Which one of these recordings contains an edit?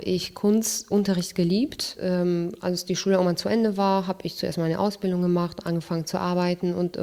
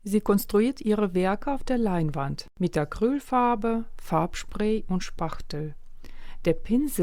second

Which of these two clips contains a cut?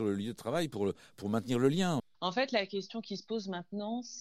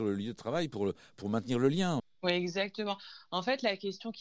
first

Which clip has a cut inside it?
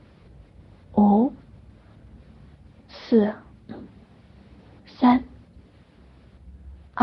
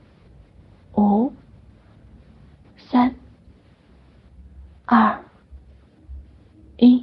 second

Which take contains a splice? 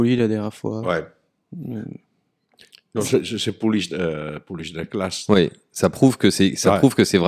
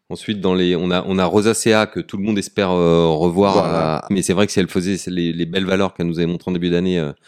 second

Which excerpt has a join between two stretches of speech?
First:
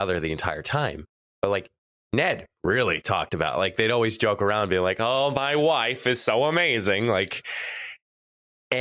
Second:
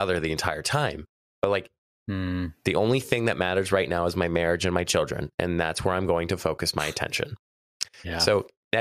second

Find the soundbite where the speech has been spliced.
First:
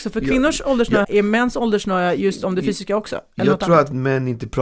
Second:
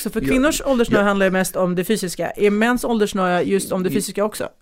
first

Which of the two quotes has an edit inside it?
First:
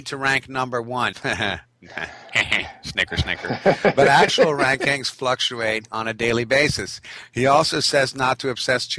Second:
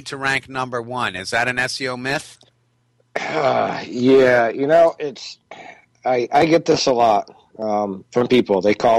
first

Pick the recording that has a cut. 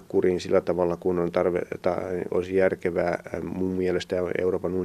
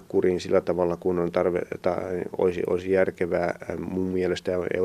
first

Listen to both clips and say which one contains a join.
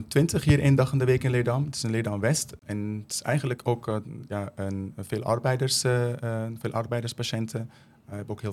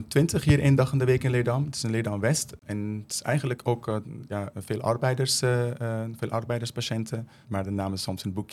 second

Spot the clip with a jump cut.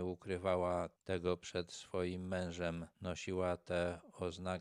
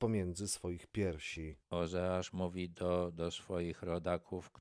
second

